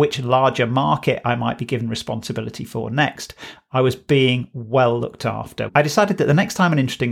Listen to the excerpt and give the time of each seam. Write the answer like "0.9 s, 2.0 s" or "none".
5.7 s